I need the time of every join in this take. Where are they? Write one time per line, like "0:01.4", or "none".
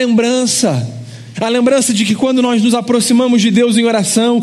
0:01.3